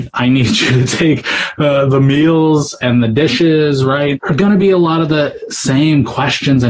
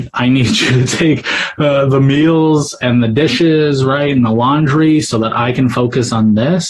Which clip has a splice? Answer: first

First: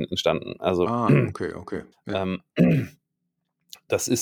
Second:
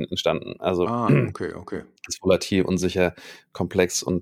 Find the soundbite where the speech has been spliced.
first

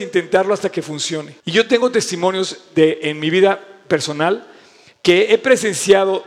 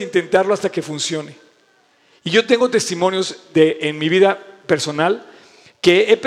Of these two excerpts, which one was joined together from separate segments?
first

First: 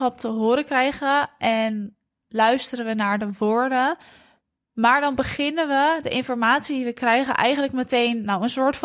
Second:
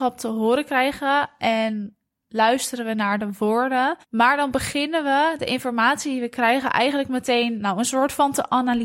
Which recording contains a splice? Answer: second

